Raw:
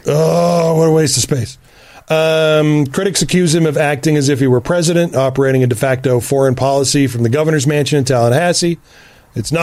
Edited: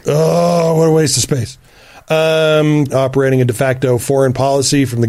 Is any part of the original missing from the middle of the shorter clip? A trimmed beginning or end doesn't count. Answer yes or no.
yes